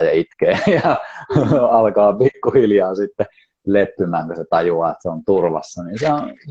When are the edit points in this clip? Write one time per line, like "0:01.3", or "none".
none

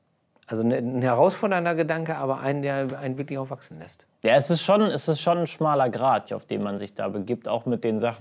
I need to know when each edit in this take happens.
0:04.1
0:06.3

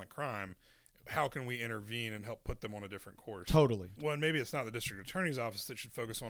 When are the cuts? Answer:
0:04.0

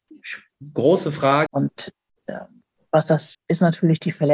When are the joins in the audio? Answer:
0:01.5
0:03.3

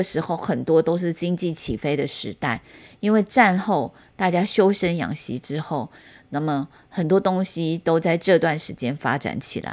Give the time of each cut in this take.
none

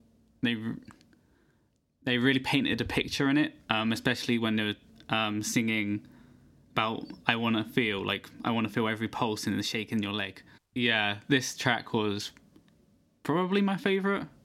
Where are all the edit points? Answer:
0:10.6

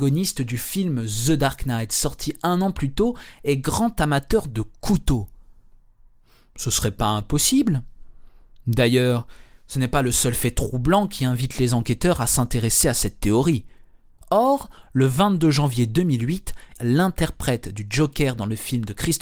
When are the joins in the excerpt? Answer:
0:14.2
0:16.8

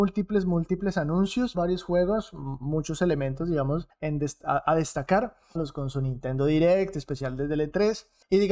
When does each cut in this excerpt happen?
0:01.5
0:05.5

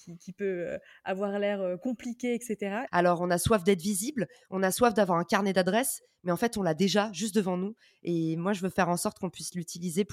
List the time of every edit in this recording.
0:02.9

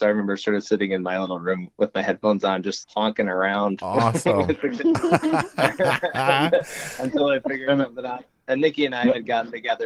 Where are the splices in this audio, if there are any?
0:02.8

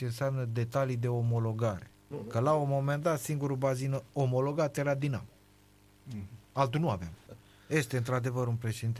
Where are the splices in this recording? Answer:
0:02.1
0:07.3

